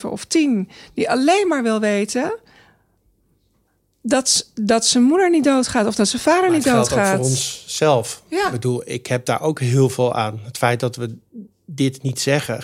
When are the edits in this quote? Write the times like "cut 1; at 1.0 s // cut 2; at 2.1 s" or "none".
none